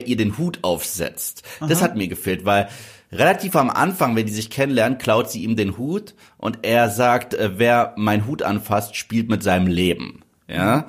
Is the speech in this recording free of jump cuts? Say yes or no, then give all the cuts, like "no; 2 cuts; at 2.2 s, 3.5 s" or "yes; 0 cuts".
yes; 0 cuts